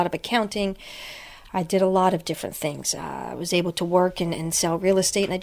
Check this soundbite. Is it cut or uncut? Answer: cut